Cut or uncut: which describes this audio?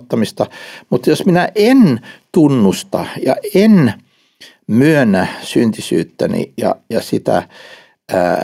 uncut